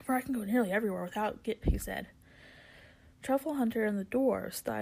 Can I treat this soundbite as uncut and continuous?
no; 1 cut; at 1.6 s

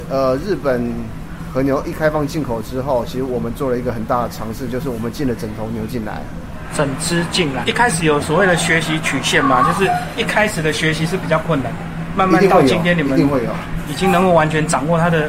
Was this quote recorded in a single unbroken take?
no; 1 cut; at 7.6 s

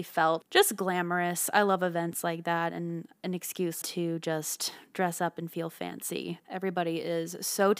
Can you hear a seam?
yes; 2 cuts; at 3.8 s, 6.4 s

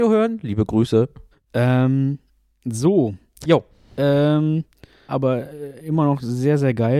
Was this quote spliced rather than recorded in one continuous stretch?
yes; 3 cuts; at 1.3 s, 3.4 s, 5.1 s

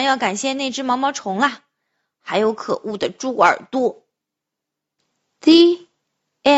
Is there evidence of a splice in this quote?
no; 0 cuts

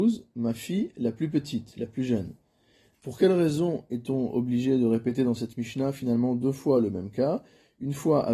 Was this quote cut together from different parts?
yes; 1 cut; at 2.9 s

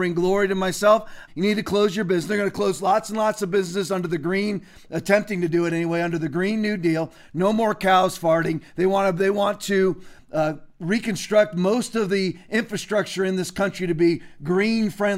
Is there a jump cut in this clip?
yes; 1 cut; at 1.3 s

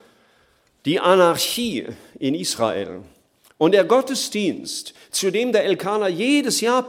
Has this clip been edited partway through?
no; 0 cuts

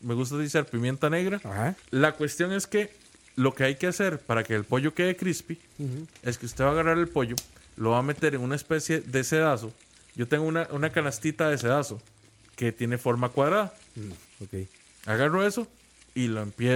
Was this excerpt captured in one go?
no; 2 cuts; at 1.8 s, 14.2 s

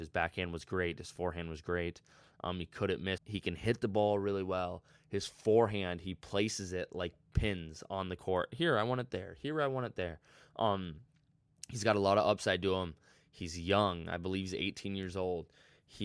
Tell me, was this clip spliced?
yes; 1 cut; at 3.2 s

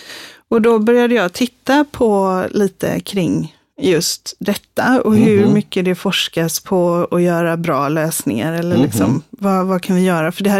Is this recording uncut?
yes; 0 cuts

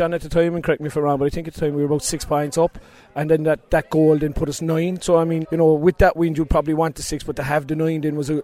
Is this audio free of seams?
no; 1 cut; at 5.4 s

